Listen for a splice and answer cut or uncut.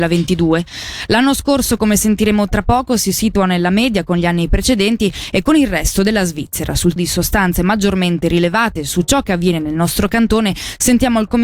cut